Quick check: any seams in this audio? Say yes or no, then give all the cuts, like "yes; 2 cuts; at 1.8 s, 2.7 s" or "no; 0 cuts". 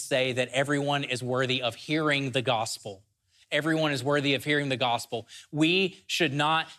no; 0 cuts